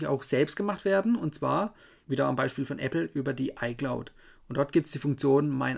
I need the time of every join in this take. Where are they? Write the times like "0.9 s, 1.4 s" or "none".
none

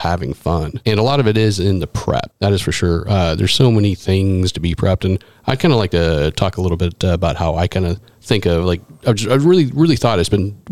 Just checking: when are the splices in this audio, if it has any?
none

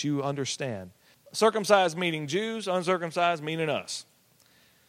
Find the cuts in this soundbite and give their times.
1.1 s

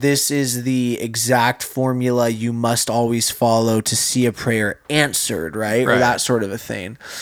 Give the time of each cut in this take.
none

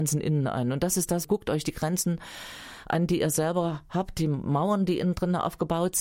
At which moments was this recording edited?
1.2 s

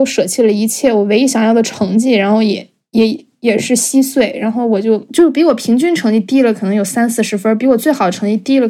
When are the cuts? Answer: none

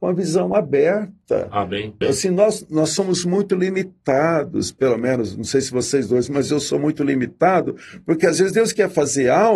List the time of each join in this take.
2.0 s

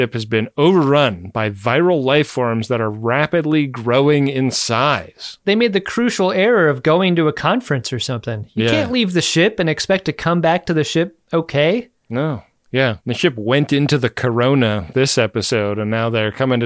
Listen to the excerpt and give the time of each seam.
13.0 s

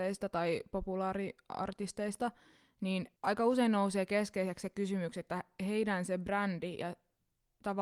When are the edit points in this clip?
3.2 s

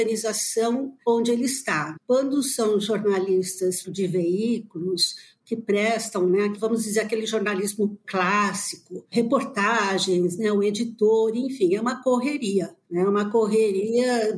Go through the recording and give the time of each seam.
3.8 s

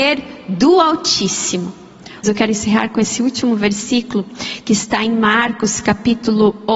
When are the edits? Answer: 2.2 s

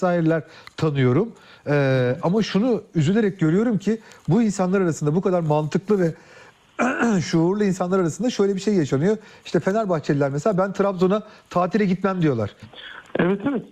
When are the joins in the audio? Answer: 12.6 s

